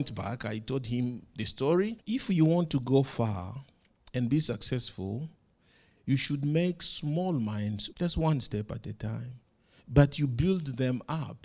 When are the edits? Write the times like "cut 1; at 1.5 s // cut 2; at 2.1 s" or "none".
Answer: cut 1; at 2.0 s // cut 2; at 7.9 s